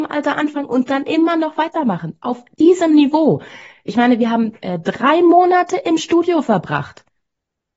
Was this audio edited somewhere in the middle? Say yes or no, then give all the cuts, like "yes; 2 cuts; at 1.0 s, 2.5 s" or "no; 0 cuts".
no; 0 cuts